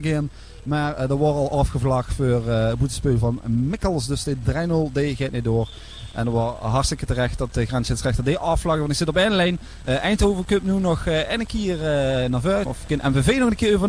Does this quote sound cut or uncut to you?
cut